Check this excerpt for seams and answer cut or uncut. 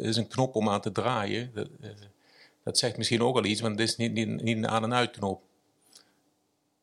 uncut